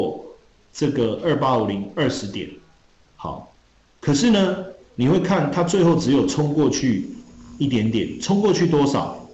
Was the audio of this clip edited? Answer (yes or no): yes